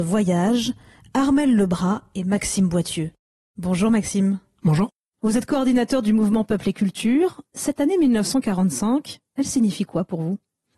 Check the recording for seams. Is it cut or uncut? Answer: uncut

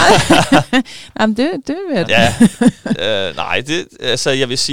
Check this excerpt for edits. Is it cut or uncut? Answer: cut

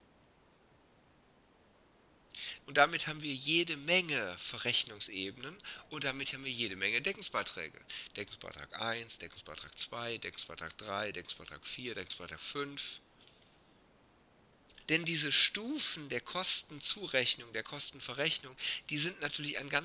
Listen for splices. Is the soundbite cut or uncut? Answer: cut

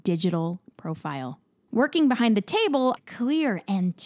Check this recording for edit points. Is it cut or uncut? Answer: cut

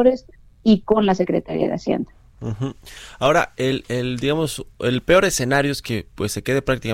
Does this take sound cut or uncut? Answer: uncut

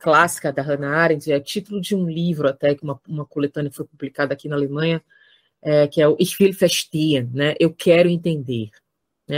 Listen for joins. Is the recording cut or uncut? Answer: uncut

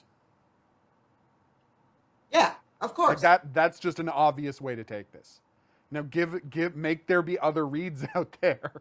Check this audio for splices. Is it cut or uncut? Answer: uncut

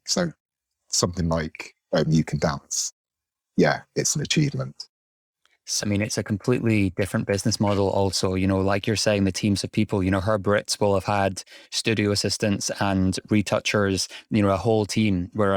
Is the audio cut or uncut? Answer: cut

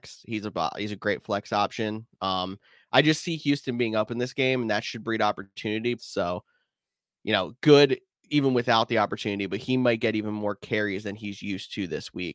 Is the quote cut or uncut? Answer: cut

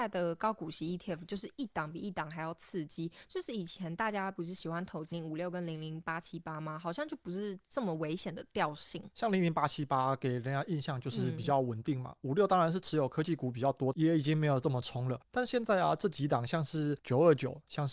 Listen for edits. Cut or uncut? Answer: cut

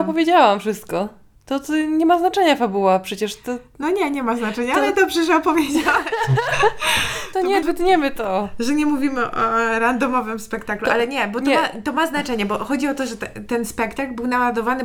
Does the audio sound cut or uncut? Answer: cut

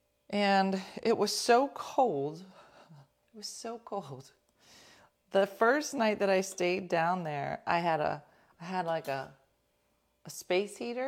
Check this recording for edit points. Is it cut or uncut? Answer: cut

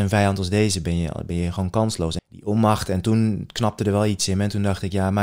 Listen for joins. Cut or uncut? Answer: cut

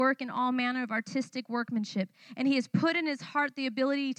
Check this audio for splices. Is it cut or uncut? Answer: uncut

